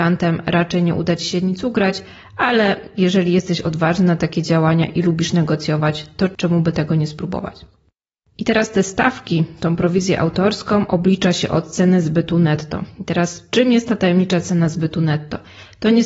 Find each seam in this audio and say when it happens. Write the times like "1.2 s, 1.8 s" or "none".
none